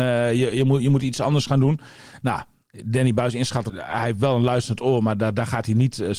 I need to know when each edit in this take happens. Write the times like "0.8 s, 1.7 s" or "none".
3.7 s